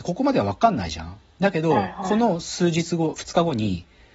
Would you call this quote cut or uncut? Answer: uncut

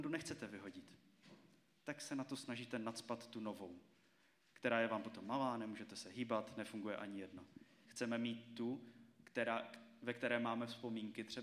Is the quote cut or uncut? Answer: cut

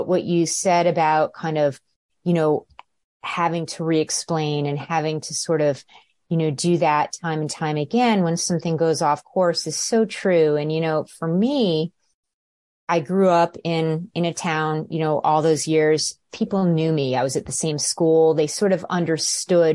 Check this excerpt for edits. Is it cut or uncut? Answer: uncut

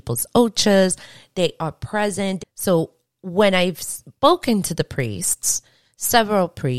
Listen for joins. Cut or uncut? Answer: cut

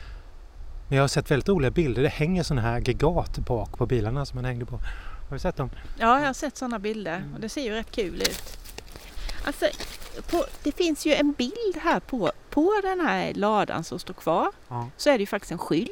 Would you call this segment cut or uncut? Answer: uncut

